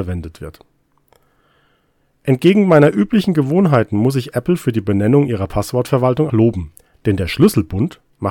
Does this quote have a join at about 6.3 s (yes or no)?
yes